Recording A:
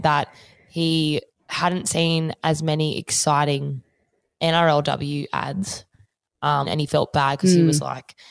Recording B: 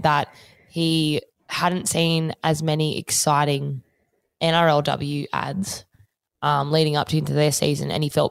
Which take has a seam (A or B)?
A